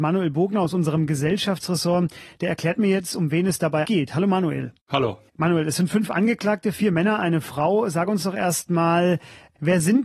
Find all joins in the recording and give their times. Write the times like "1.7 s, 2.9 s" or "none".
3.8 s